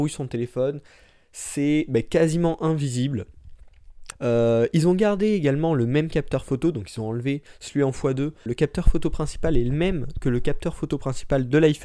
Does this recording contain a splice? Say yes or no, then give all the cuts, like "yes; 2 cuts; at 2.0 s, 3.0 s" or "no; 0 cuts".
yes; 2 cuts; at 4.1 s, 8.5 s